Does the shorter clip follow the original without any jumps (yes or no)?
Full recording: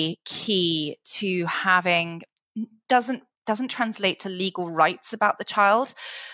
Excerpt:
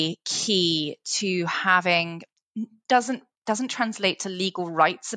yes